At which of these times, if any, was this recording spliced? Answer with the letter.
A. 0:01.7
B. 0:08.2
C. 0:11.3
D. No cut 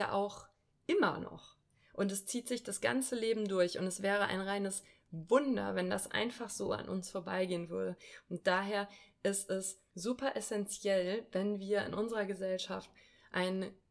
D